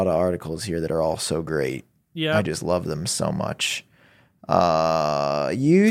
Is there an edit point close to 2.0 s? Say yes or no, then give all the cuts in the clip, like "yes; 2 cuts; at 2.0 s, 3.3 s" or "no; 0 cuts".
no; 0 cuts